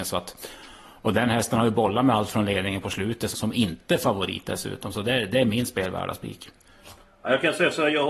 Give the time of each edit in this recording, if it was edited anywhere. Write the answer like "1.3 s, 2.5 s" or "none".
3.3 s